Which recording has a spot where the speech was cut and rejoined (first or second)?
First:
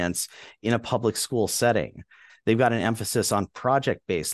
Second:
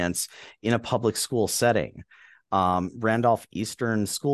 first